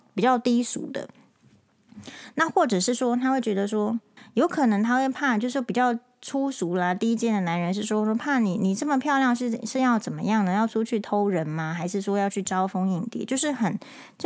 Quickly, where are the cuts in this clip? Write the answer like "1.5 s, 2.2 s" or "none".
4.2 s